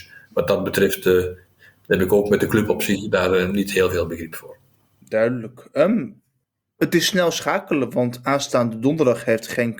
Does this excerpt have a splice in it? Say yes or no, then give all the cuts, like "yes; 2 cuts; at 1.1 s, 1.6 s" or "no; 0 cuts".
no; 0 cuts